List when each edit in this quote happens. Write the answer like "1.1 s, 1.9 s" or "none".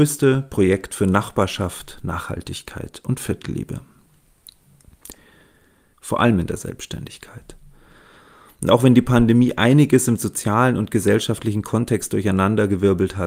5.9 s